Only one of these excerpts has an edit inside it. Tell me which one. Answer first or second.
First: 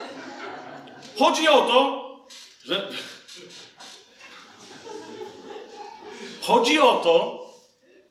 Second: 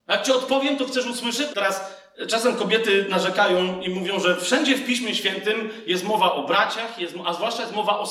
second